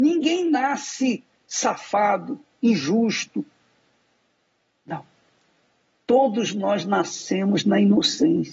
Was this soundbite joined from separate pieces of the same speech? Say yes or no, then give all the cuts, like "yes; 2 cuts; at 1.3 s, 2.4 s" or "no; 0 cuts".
no; 0 cuts